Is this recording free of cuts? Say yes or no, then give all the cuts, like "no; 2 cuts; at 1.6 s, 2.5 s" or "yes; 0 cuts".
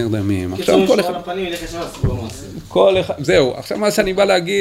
yes; 0 cuts